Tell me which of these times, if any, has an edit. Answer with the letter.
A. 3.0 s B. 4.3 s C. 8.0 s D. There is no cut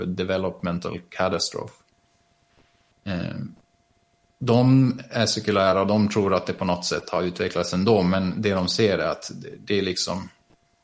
D